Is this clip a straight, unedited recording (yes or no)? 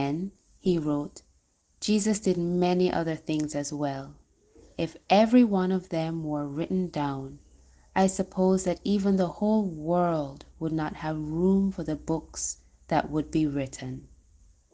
yes